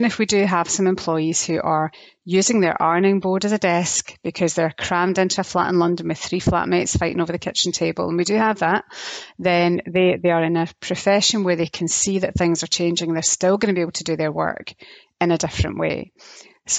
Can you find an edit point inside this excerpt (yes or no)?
no